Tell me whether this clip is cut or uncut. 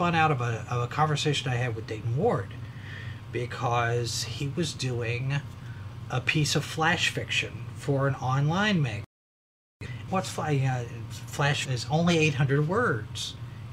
cut